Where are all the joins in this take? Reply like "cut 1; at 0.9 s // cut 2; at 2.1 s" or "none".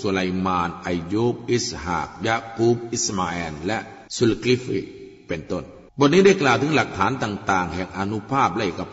cut 1; at 4.1 s // cut 2; at 5.9 s